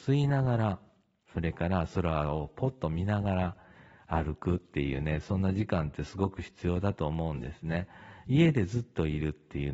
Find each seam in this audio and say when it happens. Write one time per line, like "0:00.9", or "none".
none